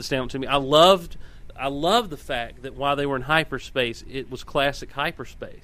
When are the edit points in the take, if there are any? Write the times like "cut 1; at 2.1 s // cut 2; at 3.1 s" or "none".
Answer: none